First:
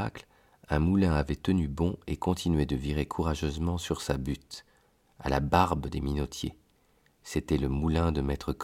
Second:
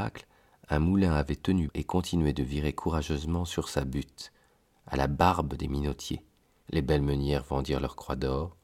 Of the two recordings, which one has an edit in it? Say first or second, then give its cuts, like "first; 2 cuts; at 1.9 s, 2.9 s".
second; 2 cuts; at 1.7 s, 6.6 s